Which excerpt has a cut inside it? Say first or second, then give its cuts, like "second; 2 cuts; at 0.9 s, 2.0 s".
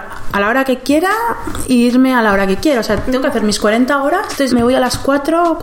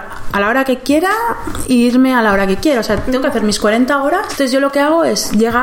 first; 1 cut; at 4.5 s